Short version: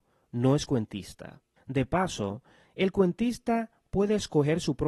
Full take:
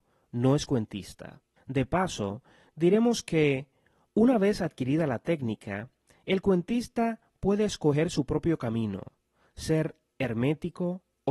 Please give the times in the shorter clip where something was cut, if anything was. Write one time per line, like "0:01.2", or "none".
0:02.6